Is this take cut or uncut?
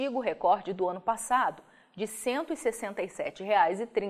uncut